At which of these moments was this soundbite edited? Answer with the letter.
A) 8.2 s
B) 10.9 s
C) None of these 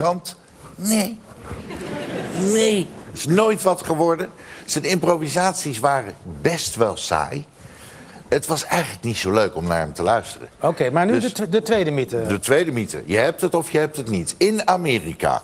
A